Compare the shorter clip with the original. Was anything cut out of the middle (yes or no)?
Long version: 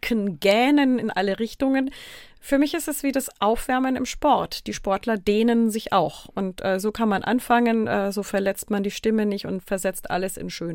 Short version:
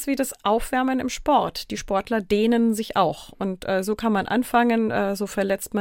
no